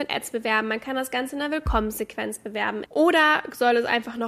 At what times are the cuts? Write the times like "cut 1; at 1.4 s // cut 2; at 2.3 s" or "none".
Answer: cut 1; at 2.9 s

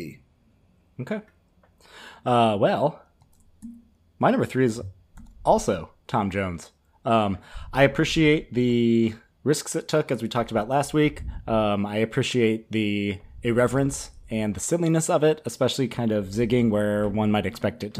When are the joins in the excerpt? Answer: none

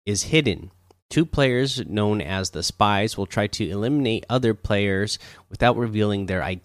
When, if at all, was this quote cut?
none

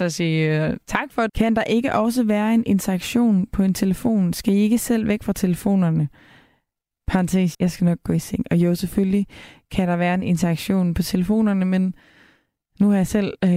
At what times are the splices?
cut 1; at 1.3 s // cut 2; at 7.5 s

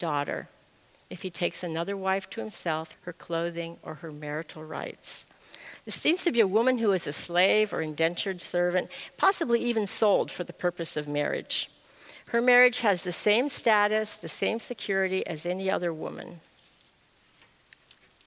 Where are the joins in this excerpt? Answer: cut 1; at 2.9 s

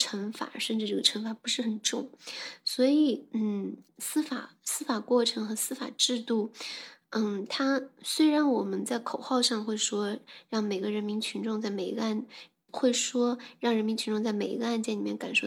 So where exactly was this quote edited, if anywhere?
cut 1; at 3.9 s // cut 2; at 12.7 s

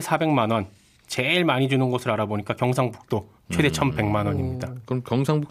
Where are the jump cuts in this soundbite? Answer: none

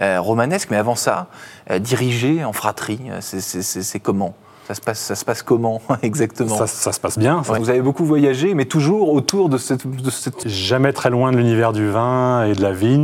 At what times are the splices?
cut 1; at 7.6 s // cut 2; at 10.4 s

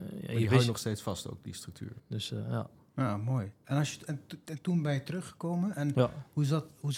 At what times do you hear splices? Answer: cut 1; at 2.0 s

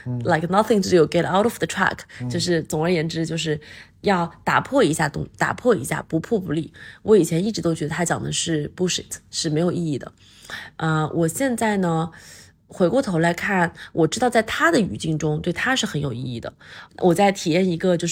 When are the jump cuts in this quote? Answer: cut 1; at 16.9 s

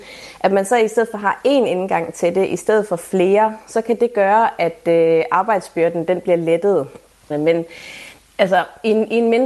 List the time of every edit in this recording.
cut 1; at 7.3 s

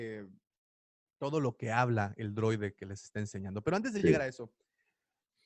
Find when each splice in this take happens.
none

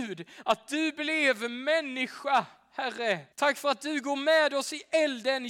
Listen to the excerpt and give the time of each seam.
cut 1; at 3.3 s

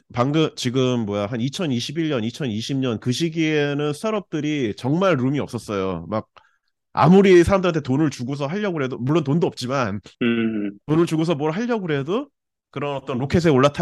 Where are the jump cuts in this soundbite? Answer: cut 1; at 10.1 s

